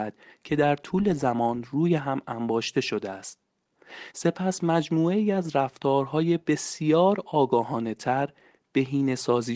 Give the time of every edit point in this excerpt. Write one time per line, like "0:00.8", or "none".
none